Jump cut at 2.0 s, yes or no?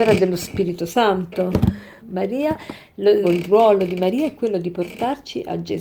yes